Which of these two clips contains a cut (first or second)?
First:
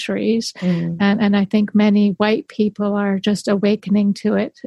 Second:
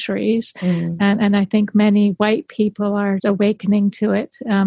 second